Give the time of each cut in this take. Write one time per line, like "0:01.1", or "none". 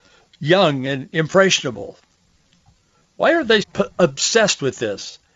0:03.6